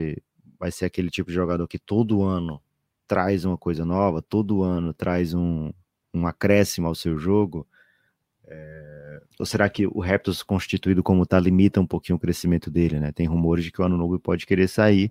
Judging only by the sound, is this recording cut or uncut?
cut